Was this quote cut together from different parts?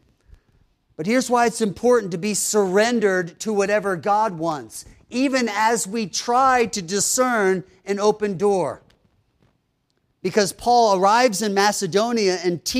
no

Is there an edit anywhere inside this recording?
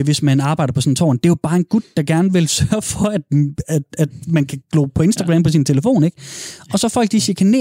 no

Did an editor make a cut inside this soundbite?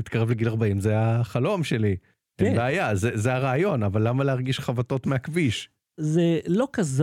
no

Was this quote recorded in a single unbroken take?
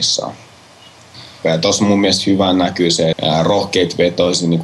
no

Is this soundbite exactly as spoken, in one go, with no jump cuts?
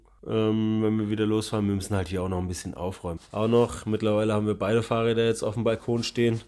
no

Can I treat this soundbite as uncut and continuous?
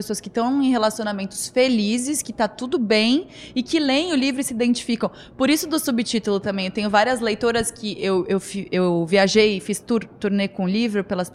yes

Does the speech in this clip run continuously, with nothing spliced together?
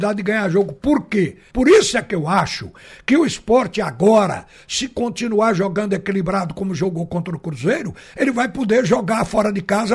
no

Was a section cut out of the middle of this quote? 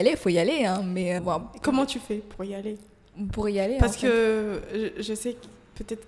yes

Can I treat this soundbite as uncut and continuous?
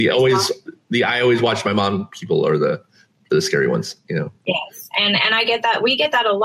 yes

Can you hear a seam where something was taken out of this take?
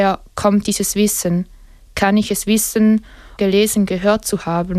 yes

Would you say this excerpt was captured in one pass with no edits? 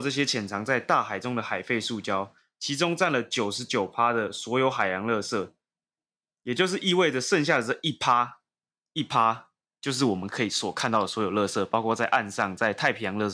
yes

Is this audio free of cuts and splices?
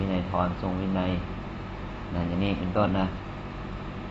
yes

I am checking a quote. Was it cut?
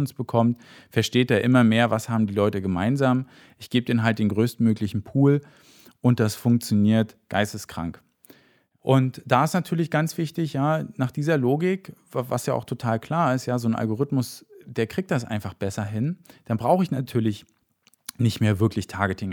no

